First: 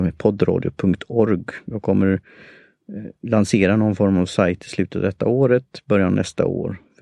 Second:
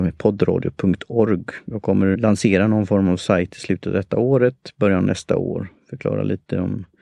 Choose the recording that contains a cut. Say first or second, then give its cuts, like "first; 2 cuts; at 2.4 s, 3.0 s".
second; 1 cut; at 2.1 s